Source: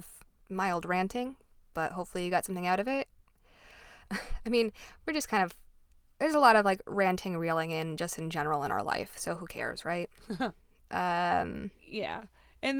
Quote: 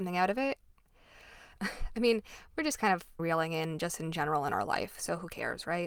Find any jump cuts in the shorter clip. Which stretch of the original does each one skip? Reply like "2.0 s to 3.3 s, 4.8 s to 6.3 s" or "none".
5.7 s to 7.4 s